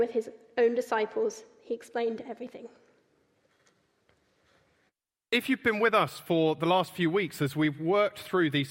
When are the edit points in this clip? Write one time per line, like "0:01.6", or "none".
none

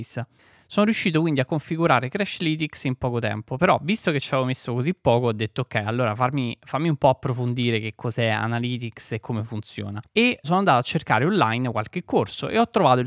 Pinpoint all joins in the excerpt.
0:10.4

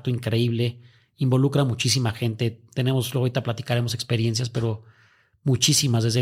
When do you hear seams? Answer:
none

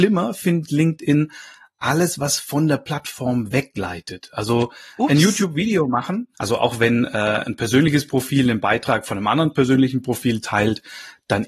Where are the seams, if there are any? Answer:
0:06.3

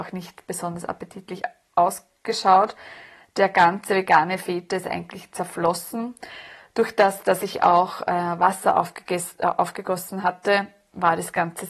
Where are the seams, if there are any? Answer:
none

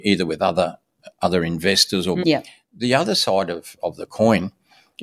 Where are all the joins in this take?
0:02.2

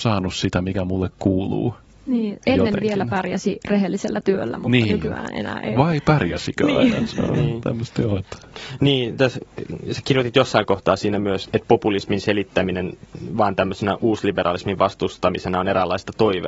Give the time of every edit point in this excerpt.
0:11.4

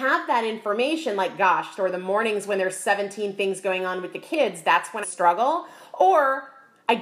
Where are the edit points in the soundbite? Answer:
0:01.8
0:05.0

